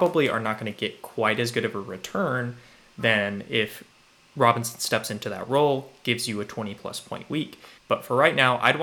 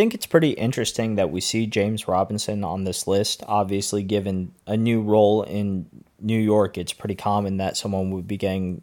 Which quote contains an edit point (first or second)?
first